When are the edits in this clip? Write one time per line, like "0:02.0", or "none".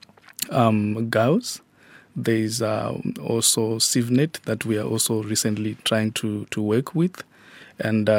none